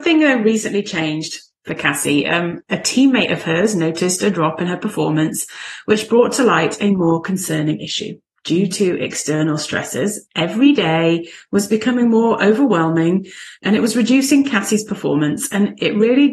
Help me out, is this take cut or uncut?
uncut